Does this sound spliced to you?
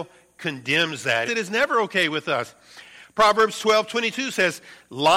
yes; 1 cut; at 1.3 s

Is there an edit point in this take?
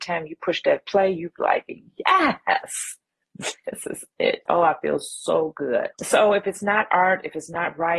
yes; 1 cut; at 4.5 s

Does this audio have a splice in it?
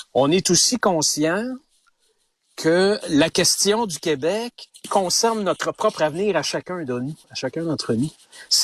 yes; 1 cut; at 3.0 s

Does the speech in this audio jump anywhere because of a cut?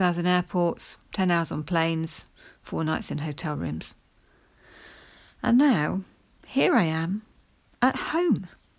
no; 0 cuts

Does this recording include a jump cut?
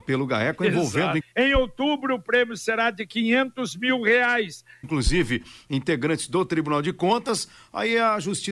yes; 2 cuts; at 1.2 s, 4.8 s

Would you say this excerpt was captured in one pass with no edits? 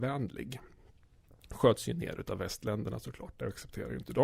yes; 0 cuts

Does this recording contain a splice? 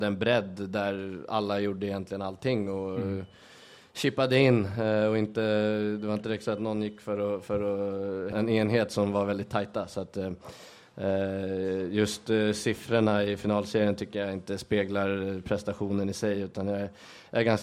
yes; 1 cut; at 8.3 s

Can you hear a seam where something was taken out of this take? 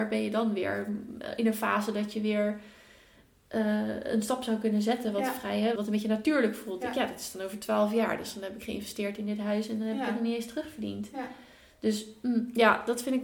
yes; 1 cut; at 5.8 s

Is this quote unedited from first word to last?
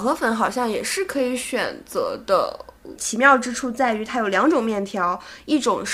no; 1 cut; at 3.0 s

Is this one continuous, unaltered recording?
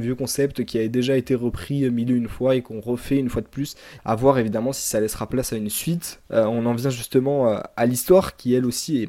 no; 2 cuts; at 4.0 s, 6.2 s

